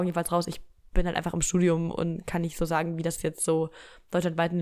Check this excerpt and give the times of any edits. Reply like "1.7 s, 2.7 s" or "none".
none